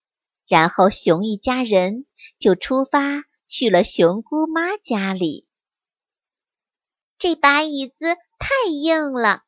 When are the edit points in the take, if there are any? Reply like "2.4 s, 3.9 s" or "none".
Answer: 7.0 s